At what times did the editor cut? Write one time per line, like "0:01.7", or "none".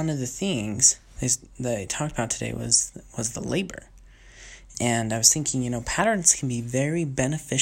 0:04.7